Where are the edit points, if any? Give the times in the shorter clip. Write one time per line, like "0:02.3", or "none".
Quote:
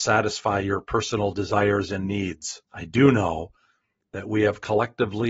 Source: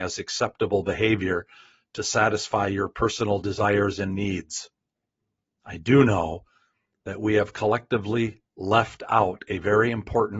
0:02.6